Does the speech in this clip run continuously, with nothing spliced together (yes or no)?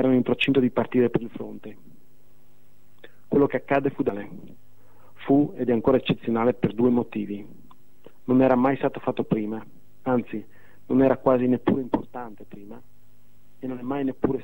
yes